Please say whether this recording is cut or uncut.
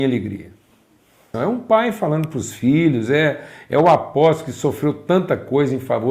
cut